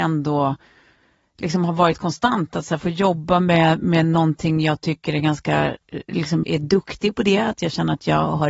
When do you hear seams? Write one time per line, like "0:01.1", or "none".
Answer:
0:06.4